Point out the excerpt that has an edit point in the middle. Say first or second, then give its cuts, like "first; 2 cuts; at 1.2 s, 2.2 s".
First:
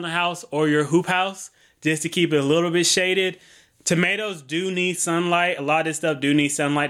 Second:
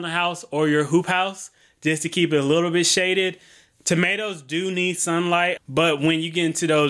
second; 1 cut; at 5.6 s